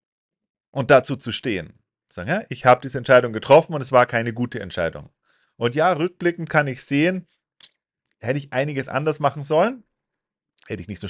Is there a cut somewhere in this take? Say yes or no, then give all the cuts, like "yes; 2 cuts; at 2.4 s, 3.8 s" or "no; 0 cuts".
no; 0 cuts